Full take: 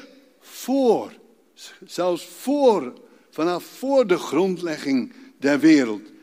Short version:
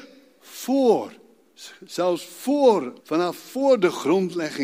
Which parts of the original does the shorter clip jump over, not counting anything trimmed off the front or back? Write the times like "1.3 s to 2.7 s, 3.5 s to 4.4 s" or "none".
3.0 s to 3.3 s